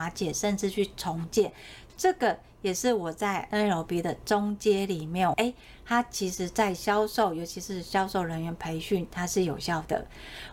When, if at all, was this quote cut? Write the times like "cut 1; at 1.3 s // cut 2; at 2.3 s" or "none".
cut 1; at 5.3 s

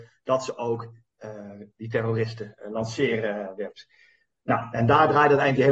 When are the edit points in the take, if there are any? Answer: cut 1; at 1.7 s

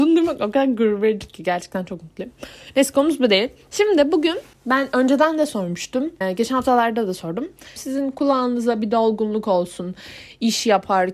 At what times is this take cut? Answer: cut 1; at 7.8 s

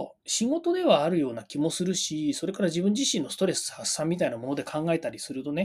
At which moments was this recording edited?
none

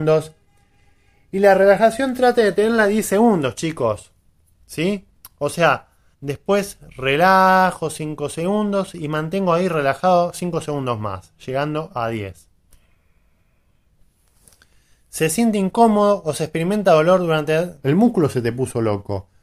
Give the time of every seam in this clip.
cut 1; at 6.1 s // cut 2; at 17.8 s

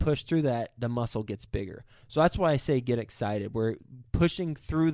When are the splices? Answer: none

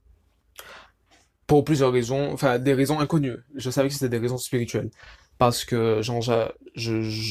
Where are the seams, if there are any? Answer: none

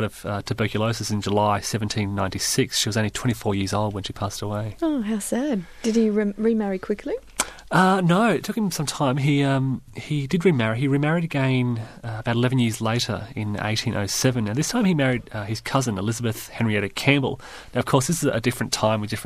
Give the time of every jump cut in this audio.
none

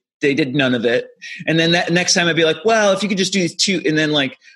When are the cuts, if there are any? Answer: cut 1; at 1.2 s

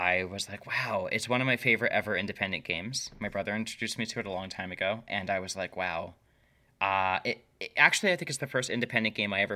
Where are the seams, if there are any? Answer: none

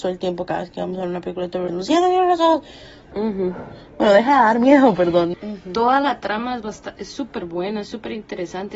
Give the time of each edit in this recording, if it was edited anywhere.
cut 1; at 1.7 s // cut 2; at 3.1 s // cut 3; at 5.3 s

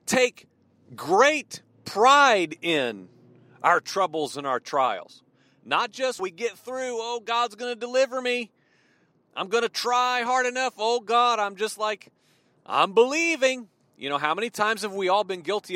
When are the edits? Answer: cut 1; at 6.2 s

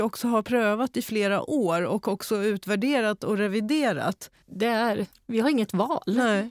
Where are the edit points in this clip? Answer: cut 1; at 4.4 s

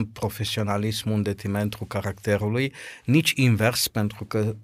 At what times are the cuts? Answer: none

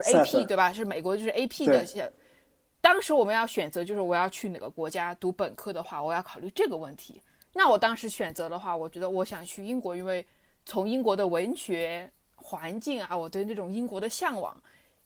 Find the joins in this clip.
none

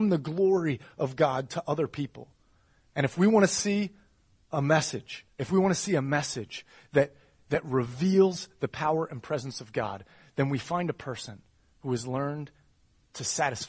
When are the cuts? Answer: cut 1; at 5.3 s

